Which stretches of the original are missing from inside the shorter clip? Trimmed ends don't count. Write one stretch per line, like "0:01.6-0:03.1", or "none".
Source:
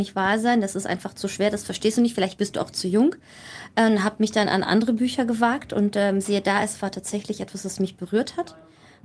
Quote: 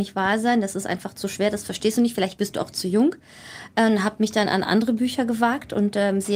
none